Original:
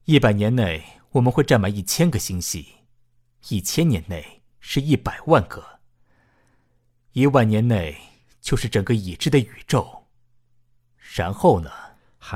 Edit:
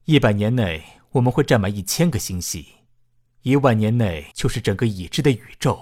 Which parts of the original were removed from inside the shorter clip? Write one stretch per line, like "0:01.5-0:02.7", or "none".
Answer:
0:03.3-0:07.0
0:08.0-0:08.4